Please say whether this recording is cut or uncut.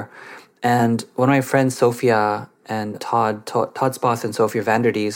uncut